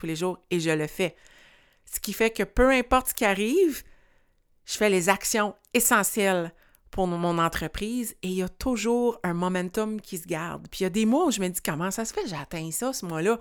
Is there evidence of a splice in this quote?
no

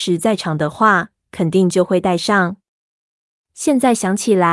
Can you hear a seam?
no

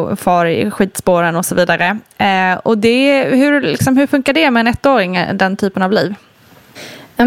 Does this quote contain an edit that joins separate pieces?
no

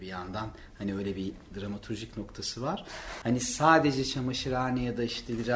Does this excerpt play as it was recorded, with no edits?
no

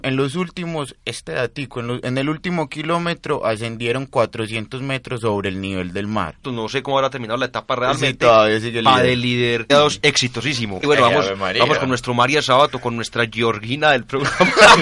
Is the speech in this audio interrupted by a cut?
yes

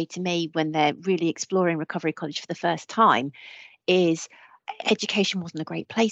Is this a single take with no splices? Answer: yes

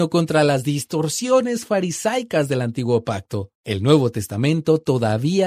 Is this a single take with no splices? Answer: no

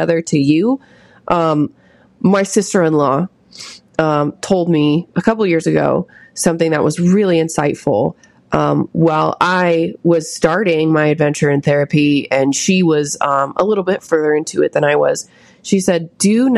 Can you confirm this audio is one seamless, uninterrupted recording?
yes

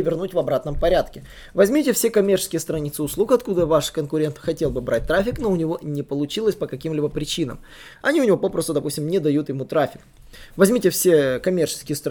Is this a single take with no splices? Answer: yes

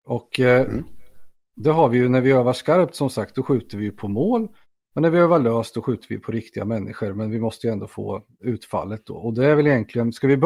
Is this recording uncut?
yes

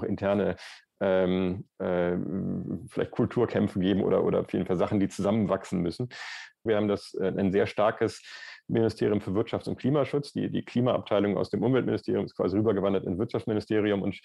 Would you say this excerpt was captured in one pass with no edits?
no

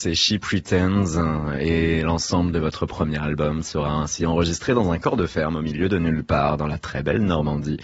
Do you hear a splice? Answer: no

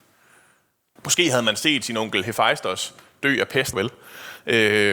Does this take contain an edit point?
yes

